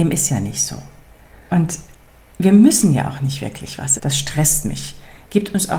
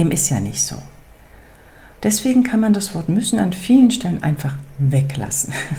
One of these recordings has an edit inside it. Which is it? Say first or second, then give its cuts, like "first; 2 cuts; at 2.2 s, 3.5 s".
first; 2 cuts; at 1.5 s, 4.0 s